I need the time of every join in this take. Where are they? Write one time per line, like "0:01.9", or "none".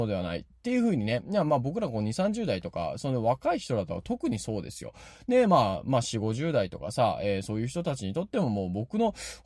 none

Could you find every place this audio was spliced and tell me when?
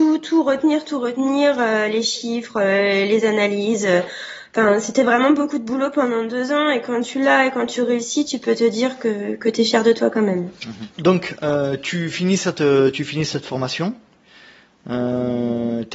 none

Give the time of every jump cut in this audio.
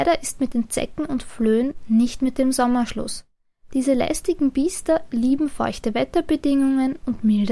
none

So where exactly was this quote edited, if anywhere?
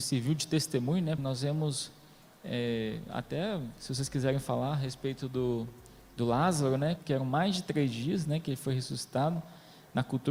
0:01.2
0:07.0

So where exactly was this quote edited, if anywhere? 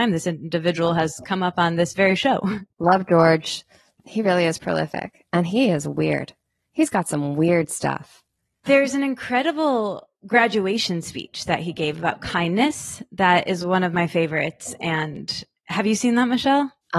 0:08.7

